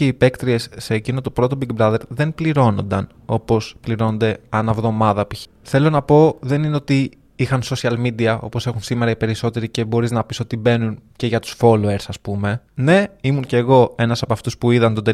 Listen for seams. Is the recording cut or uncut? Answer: cut